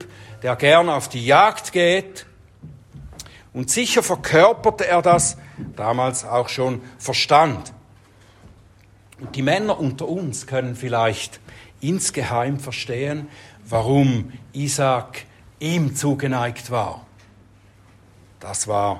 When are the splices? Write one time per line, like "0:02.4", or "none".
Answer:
0:05.7